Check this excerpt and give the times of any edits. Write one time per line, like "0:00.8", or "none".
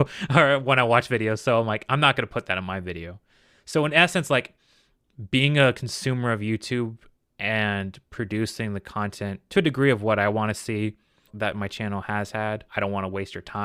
0:11.3
0:12.7